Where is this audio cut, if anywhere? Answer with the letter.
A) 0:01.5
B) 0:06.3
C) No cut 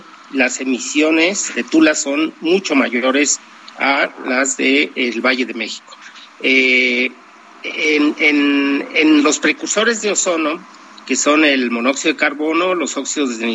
A